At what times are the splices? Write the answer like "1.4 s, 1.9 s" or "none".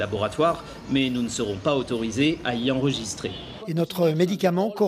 3.6 s